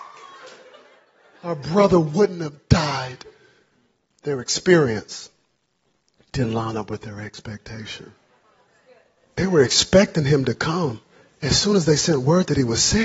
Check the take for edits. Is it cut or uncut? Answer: uncut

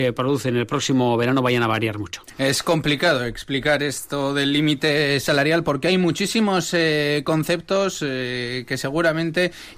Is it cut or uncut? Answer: uncut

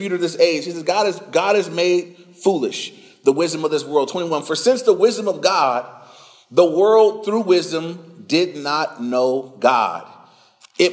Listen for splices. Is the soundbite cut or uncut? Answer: uncut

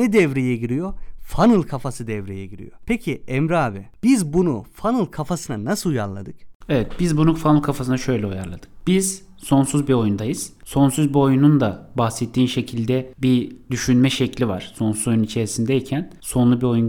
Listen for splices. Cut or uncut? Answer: uncut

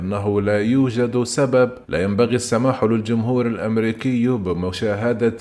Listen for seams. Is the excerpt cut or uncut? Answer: cut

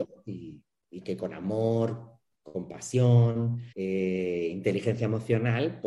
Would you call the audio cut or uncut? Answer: cut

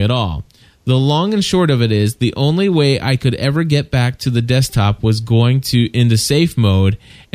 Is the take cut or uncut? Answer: uncut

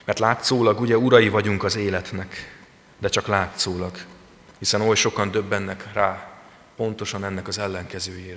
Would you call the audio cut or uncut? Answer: uncut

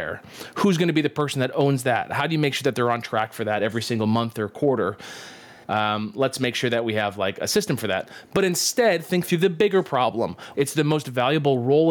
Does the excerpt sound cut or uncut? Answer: cut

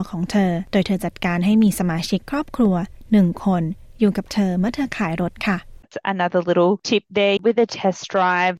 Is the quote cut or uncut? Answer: cut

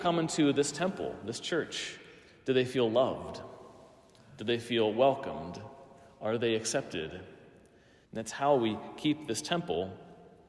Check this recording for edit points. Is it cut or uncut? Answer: cut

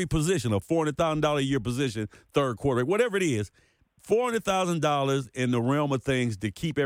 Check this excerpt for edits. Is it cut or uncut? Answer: uncut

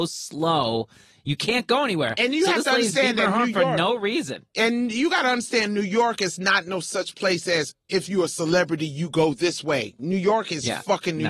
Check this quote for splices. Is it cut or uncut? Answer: uncut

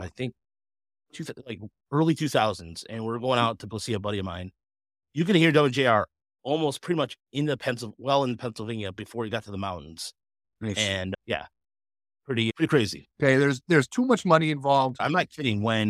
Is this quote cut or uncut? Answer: cut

